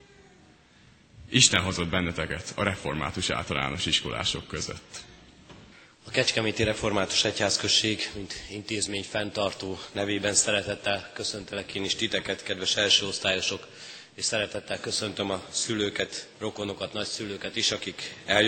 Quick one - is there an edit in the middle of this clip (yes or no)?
yes